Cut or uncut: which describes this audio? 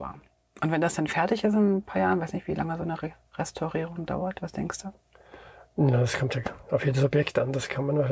uncut